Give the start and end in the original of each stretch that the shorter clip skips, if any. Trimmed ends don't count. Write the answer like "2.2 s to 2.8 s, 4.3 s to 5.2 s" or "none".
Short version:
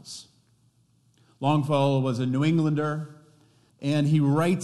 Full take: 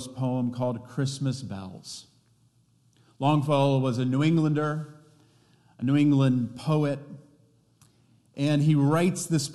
5.5 s to 8.2 s